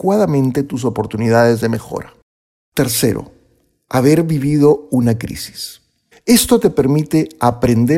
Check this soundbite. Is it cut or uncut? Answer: cut